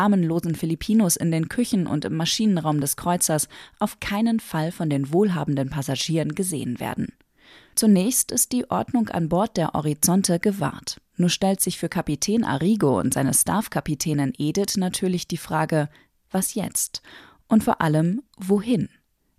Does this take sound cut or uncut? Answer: uncut